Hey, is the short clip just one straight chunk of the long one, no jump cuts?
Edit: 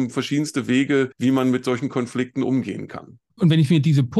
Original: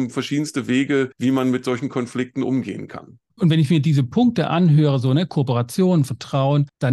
yes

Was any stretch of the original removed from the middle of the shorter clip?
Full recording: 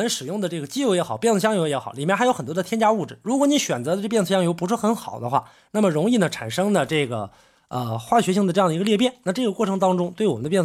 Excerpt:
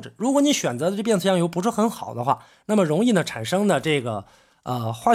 no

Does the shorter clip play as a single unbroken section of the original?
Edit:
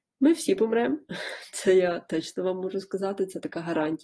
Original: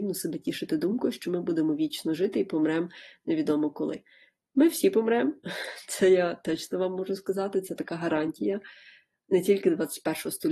yes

